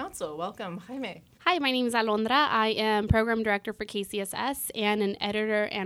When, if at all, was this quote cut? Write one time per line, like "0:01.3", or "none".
0:01.3